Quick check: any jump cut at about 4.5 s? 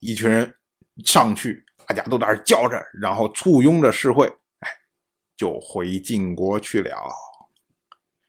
no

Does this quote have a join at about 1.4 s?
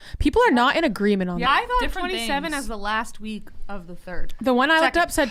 yes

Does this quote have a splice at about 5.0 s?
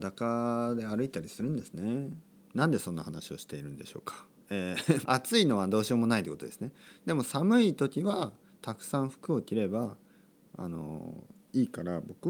yes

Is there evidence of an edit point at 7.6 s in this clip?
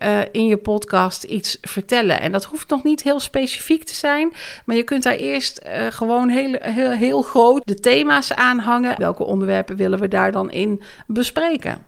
yes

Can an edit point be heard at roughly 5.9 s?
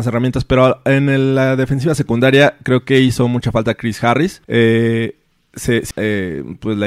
yes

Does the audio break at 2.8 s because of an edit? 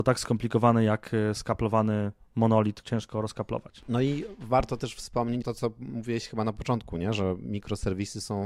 yes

